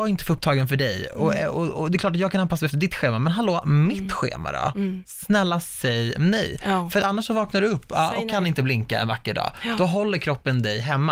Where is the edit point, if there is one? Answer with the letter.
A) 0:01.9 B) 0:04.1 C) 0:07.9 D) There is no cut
D